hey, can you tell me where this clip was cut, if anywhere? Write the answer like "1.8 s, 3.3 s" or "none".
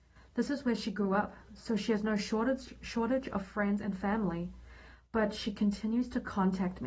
none